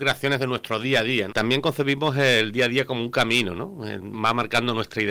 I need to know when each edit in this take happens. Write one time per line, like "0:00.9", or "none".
0:01.3
0:04.1